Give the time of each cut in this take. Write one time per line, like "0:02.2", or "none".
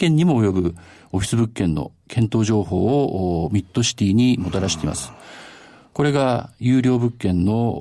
none